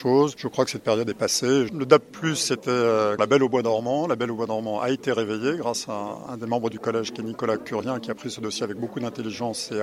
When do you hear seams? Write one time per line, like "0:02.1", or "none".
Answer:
0:01.7
0:03.2